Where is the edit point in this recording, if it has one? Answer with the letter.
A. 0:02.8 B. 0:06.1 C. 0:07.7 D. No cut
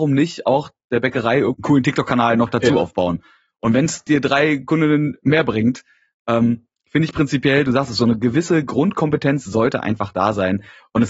D